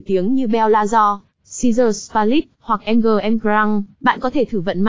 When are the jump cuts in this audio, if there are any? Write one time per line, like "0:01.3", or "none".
0:03.9